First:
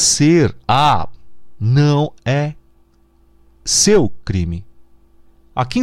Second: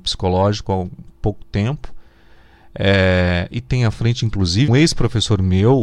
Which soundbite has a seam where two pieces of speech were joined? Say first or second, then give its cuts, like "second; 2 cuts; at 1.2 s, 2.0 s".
second; 1 cut; at 4.7 s